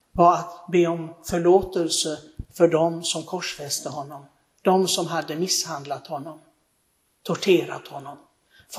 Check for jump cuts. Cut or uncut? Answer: uncut